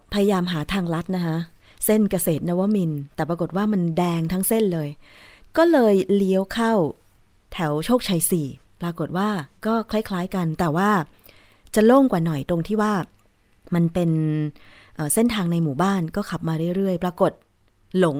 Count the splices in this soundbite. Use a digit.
1